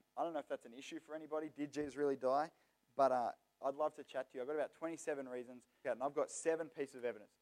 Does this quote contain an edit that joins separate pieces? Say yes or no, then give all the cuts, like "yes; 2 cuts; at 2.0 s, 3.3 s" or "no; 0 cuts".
yes; 2 cuts; at 3.6 s, 5.8 s